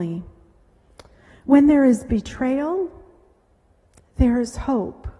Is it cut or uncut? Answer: uncut